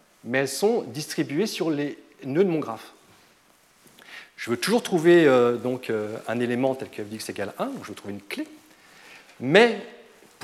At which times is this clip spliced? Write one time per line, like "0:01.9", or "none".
none